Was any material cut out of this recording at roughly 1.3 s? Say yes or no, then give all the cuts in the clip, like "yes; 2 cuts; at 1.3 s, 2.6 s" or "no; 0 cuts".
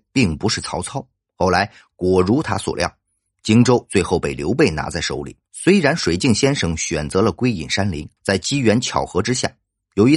yes; 3 cuts; at 1.3 s, 5.4 s, 8.2 s